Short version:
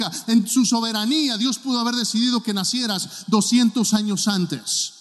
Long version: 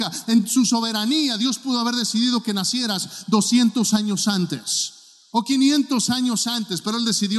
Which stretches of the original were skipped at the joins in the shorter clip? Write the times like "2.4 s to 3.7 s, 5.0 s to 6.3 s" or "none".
none